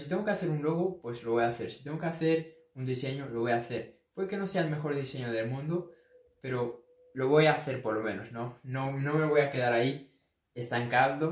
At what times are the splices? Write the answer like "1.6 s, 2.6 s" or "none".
none